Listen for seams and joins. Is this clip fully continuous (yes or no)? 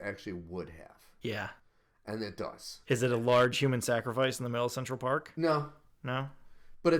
yes